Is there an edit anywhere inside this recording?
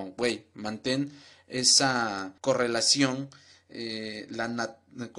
yes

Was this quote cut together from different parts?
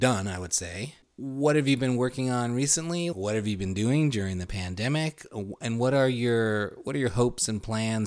yes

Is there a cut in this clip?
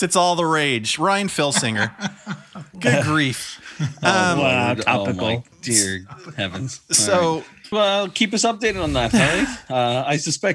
yes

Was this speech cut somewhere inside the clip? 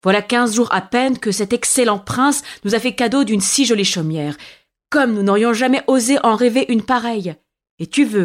no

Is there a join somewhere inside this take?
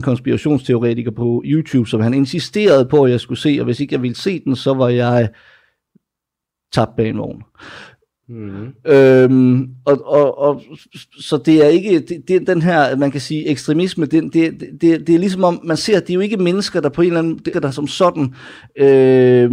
yes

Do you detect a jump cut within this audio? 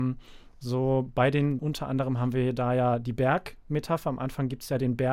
yes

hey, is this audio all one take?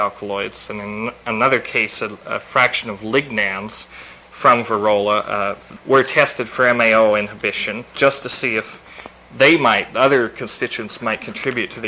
no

